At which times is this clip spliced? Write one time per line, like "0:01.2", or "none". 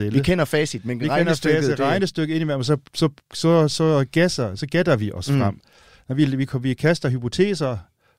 none